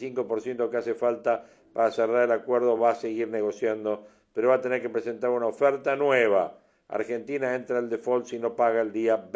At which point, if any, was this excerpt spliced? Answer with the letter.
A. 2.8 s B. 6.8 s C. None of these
C